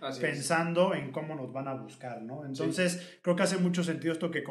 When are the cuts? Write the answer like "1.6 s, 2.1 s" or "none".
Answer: none